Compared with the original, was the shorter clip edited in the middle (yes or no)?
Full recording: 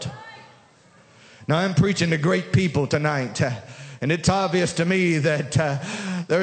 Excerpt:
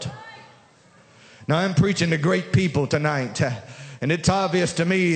no